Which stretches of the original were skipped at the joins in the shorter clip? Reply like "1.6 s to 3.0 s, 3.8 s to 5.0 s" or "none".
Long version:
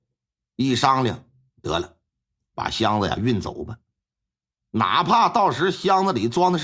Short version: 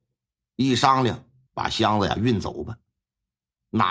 1.5 s to 2.5 s